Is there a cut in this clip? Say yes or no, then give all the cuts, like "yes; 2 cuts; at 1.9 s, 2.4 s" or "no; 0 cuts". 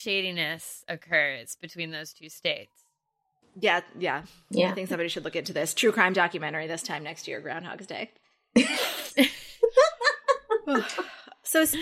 no; 0 cuts